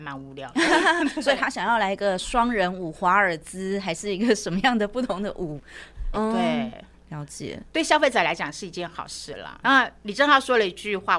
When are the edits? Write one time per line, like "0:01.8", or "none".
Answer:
0:06.1
0:09.6